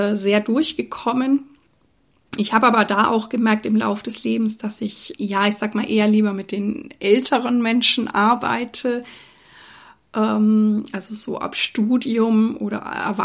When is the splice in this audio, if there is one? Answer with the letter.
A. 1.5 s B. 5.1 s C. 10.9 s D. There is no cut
B